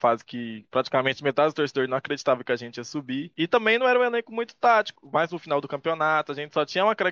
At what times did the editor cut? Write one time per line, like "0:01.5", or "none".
0:05.0